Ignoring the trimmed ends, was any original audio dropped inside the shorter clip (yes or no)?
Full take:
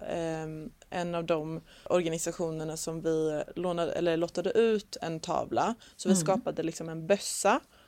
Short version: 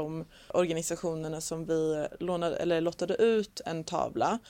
no